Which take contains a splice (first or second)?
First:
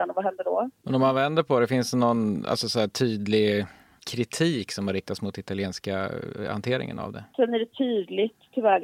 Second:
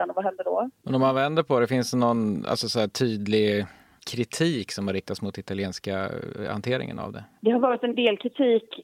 first